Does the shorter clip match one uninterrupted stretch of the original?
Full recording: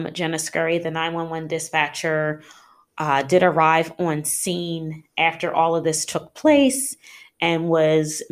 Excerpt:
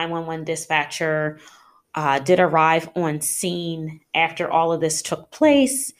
yes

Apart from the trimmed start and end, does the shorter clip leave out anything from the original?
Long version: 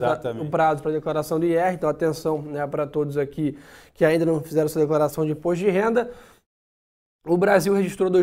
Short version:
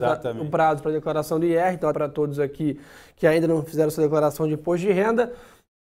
yes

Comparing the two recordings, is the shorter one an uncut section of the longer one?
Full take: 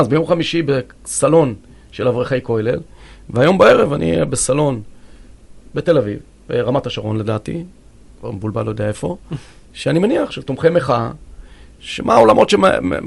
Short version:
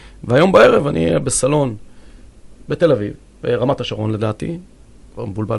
yes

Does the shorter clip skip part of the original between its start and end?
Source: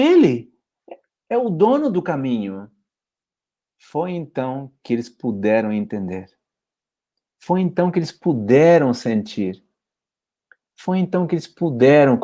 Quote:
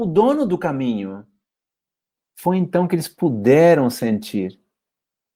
yes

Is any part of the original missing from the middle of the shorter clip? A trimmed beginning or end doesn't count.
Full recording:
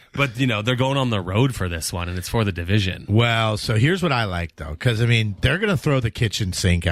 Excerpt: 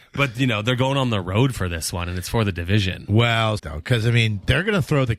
yes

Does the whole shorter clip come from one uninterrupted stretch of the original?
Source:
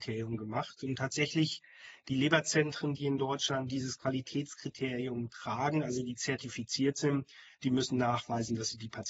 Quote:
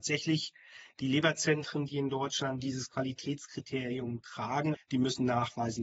no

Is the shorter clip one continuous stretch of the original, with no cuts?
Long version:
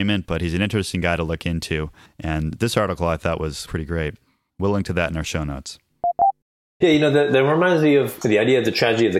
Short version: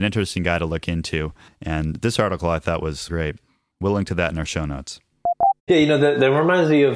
no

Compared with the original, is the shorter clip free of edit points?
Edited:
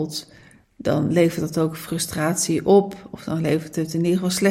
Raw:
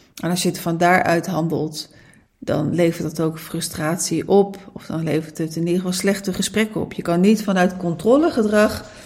yes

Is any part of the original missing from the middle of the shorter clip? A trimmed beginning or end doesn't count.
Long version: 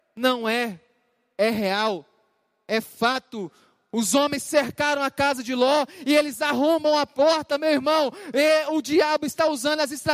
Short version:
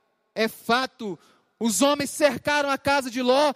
no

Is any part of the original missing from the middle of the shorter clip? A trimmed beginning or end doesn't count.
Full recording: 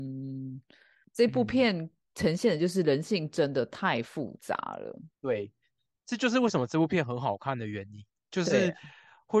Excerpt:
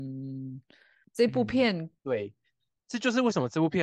yes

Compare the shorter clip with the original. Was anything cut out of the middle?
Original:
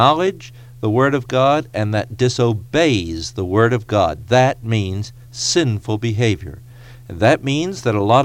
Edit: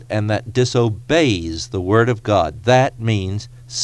no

